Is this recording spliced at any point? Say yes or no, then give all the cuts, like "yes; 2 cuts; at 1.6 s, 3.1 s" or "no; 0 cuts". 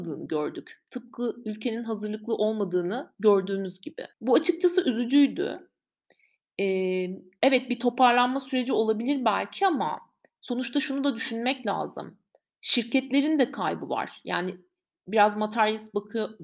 yes; 1 cut; at 4.1 s